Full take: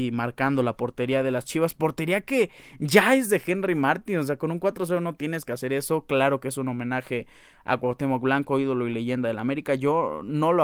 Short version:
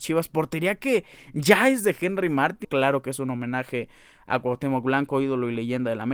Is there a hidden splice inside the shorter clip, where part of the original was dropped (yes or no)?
yes